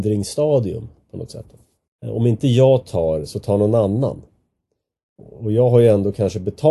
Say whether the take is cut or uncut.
cut